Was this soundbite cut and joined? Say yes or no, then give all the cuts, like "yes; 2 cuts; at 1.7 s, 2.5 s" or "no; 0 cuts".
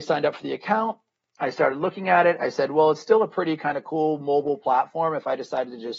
no; 0 cuts